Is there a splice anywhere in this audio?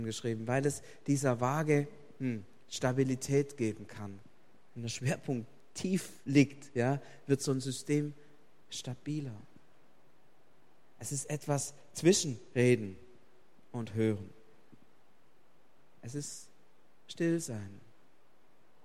no; 0 cuts

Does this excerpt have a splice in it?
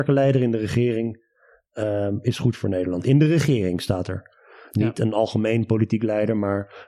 no; 0 cuts

